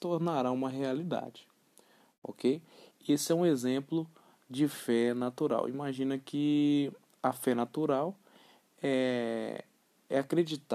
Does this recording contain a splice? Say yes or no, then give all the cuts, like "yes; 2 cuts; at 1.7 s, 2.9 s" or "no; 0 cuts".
no; 0 cuts